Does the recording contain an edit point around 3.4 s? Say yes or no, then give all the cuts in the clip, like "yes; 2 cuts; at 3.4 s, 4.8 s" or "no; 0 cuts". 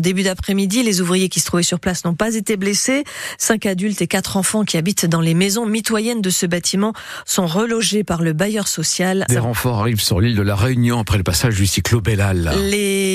no; 1 cut; at 9.3 s